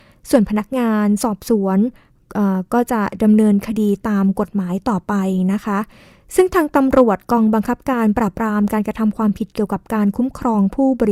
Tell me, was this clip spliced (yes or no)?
no